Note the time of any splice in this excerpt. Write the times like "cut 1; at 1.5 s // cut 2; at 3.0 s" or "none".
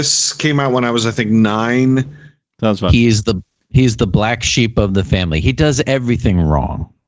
cut 1; at 2.4 s